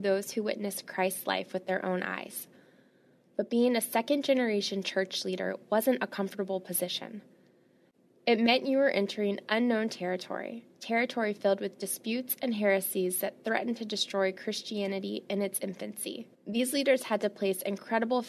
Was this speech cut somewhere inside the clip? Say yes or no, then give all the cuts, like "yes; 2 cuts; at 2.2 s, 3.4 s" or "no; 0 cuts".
yes; 1 cut; at 16.3 s